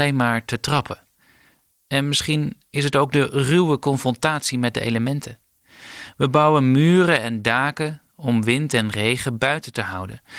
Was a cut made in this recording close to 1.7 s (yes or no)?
yes